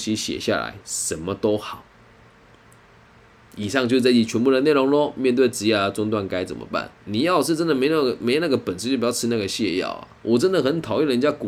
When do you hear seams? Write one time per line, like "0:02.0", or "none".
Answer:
0:07.0